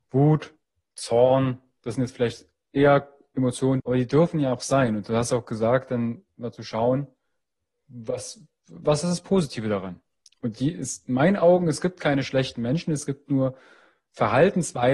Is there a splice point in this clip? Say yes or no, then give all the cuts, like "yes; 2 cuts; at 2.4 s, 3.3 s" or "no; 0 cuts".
yes; 1 cut; at 3.8 s